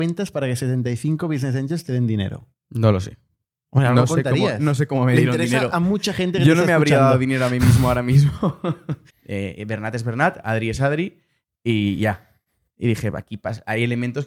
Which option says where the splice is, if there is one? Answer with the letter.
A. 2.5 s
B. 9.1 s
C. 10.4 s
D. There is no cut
B